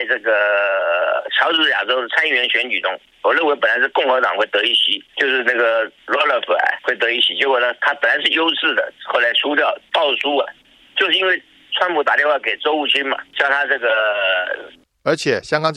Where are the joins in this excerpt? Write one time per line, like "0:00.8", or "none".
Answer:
0:14.8